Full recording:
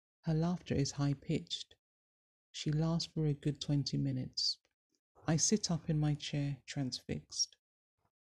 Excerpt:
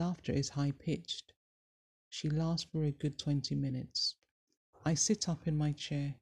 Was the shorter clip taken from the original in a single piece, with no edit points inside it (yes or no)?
yes